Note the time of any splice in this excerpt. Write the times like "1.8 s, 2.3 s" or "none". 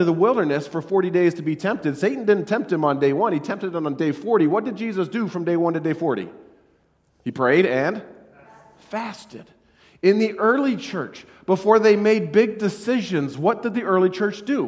none

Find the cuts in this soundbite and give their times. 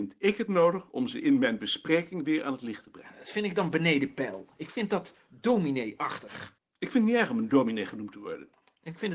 6.6 s

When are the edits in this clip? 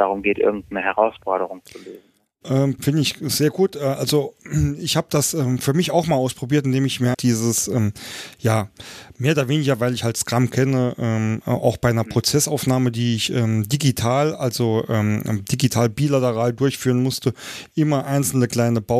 2.8 s, 7.1 s

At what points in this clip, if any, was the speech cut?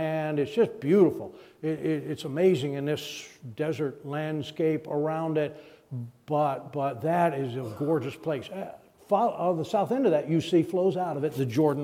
none

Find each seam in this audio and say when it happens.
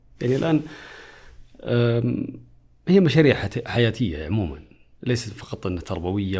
none

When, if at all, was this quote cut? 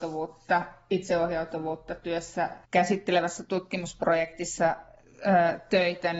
2.6 s

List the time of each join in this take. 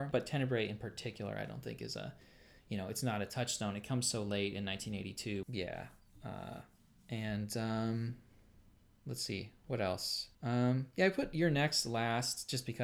5.4 s, 10.3 s

